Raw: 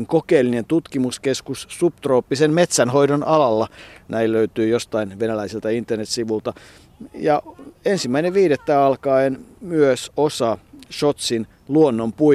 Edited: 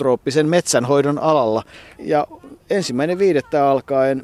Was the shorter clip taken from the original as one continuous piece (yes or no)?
no